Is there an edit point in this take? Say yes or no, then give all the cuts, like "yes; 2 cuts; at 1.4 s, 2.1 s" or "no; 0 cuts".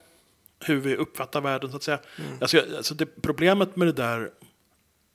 no; 0 cuts